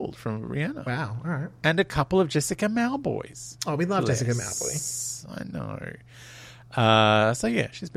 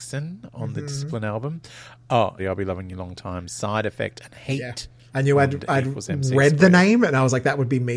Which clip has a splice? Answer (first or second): second